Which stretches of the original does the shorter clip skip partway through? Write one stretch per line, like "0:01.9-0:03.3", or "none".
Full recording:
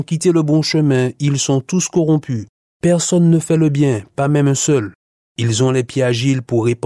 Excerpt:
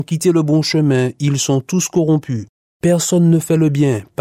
none

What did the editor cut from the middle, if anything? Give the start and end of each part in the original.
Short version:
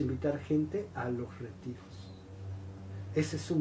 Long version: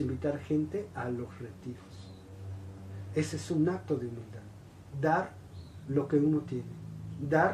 none

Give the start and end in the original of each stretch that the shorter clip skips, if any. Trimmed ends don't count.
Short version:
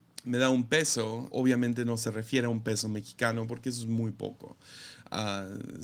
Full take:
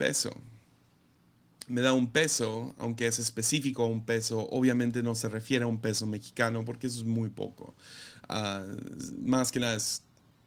0:02.7-0:04.5

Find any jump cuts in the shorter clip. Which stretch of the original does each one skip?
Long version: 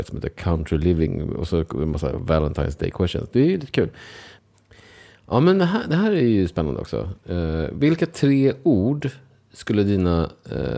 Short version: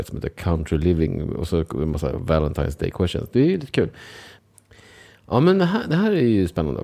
none

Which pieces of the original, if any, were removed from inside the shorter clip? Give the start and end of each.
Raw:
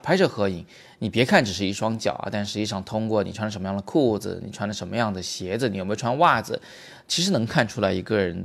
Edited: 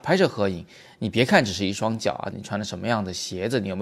0:02.3-0:04.4

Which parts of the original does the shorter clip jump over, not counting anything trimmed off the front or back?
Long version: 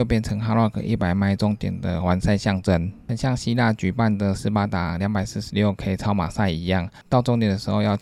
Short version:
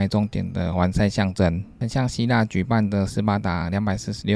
none

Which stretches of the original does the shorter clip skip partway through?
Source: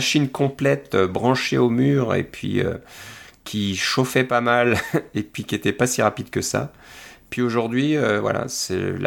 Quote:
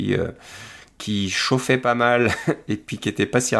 none

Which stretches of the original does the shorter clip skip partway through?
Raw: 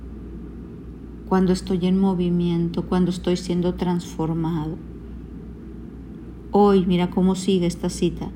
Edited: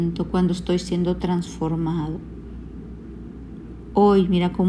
none

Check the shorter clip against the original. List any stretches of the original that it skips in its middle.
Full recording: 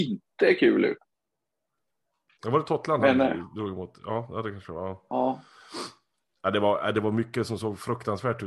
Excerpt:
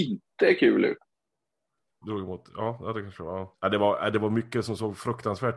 0:02.0-0:03.5
0:05.0-0:06.4

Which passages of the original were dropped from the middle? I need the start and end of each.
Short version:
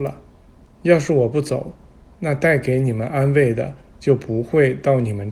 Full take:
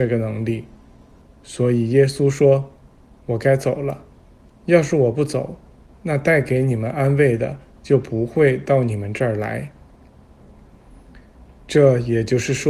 none

